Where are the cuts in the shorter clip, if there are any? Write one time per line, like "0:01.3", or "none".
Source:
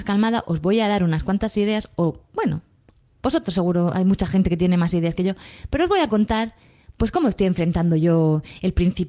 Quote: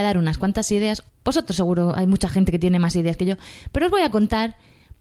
0:01.1